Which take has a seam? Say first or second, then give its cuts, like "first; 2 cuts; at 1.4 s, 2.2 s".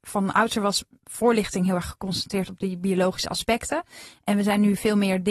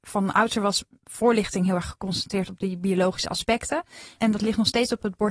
second; 1 cut; at 4.2 s